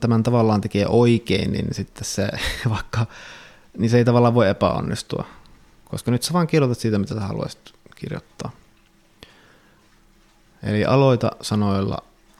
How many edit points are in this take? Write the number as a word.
zero